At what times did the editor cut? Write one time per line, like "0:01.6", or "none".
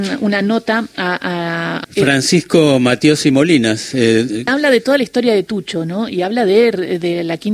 0:01.8
0:04.5